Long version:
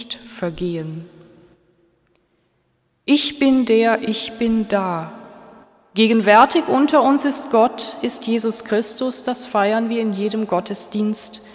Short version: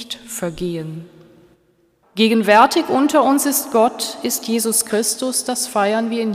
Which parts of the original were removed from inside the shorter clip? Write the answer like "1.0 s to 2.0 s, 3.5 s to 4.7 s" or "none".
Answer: 2.0 s to 5.8 s